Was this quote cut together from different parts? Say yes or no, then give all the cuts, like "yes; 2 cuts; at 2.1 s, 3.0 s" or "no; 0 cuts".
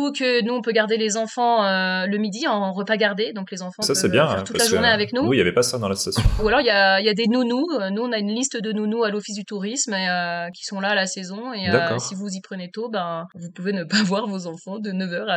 no; 0 cuts